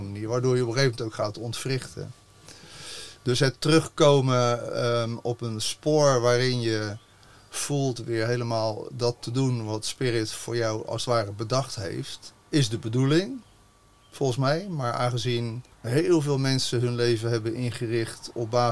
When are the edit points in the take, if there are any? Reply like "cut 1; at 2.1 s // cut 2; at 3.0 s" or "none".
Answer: cut 1; at 12.4 s // cut 2; at 15.7 s